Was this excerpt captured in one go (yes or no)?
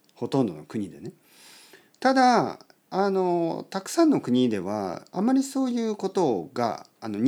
yes